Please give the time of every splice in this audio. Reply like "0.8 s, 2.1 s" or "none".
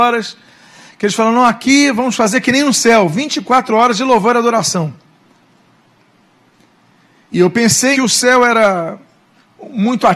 7.9 s